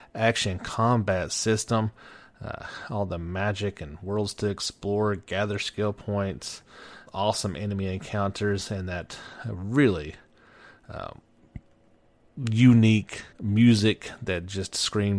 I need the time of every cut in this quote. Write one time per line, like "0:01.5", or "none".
0:07.1
0:13.3